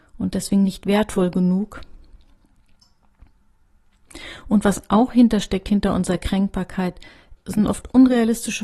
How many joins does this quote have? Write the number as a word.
one